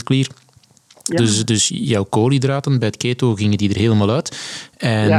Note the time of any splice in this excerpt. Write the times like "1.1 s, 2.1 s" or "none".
1.2 s